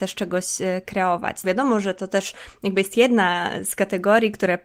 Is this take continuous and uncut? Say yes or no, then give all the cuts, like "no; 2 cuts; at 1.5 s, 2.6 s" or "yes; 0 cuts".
no; 1 cut; at 1.4 s